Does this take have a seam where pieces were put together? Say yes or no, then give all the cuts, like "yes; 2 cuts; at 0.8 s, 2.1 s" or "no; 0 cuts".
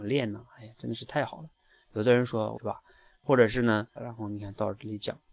yes; 2 cuts; at 2.5 s, 4.0 s